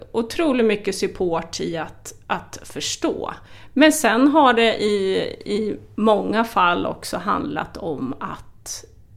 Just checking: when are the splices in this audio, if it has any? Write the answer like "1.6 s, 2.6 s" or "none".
none